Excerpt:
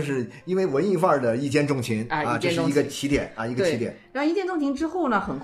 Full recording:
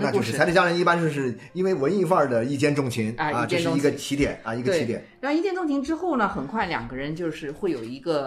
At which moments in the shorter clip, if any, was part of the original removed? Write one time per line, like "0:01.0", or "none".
none